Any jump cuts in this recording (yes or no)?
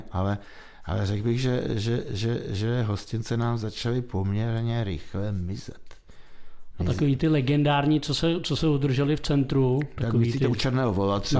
no